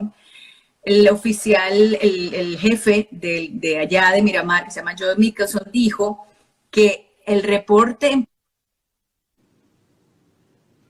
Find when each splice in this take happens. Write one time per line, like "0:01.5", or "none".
none